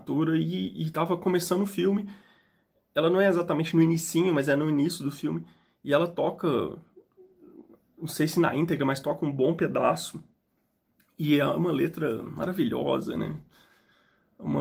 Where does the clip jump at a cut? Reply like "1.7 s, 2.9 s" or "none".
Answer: none